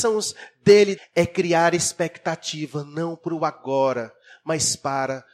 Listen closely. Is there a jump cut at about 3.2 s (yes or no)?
no